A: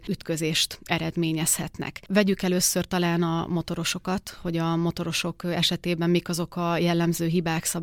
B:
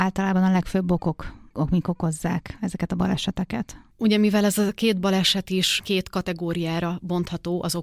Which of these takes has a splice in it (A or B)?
B